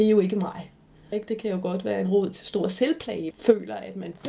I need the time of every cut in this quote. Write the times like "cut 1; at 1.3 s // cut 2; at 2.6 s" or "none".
cut 1; at 1.1 s // cut 2; at 3.3 s